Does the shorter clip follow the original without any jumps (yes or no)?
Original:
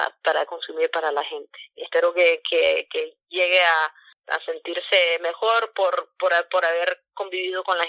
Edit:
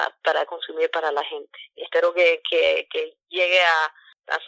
yes